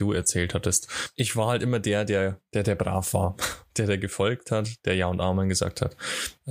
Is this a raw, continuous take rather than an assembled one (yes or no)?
yes